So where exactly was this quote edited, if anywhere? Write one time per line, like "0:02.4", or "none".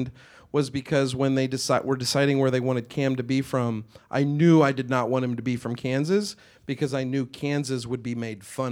none